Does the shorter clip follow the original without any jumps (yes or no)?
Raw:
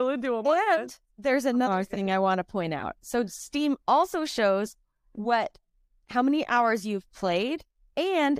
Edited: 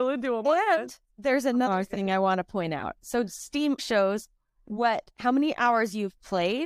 no